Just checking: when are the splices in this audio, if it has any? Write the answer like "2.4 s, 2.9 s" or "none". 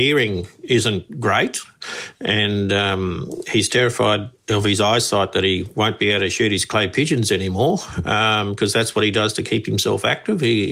4.4 s